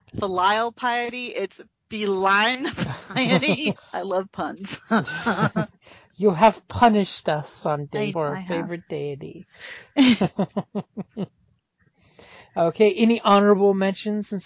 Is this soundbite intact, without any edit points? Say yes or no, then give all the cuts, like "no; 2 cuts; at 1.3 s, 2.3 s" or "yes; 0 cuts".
no; 2 cuts; at 3.8 s, 8.1 s